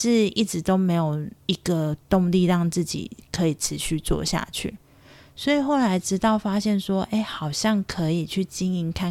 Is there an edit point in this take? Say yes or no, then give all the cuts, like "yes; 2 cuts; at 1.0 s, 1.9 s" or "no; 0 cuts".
no; 0 cuts